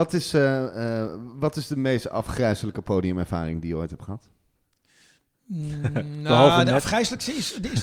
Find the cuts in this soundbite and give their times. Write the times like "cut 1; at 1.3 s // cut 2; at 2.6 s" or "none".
none

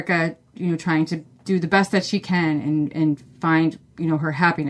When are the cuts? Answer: none

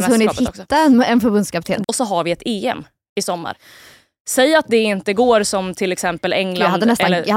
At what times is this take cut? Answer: cut 1; at 1.8 s

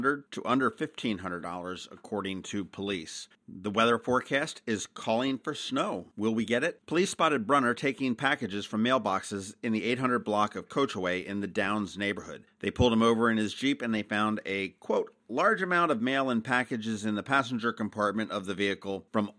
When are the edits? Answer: cut 1; at 3.3 s // cut 2; at 6.8 s

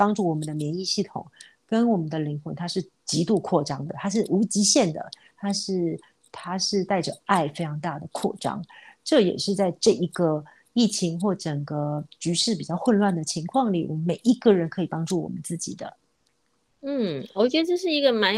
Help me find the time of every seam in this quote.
none

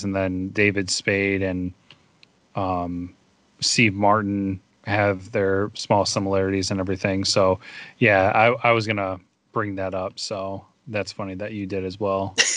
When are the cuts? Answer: none

